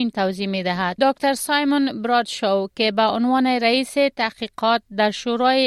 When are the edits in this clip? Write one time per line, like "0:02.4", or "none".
0:01.0